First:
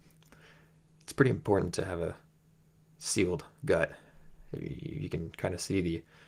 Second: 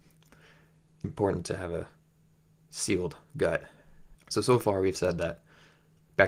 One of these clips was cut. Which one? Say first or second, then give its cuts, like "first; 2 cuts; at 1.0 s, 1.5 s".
second; 2 cuts; at 1.0 s, 4.1 s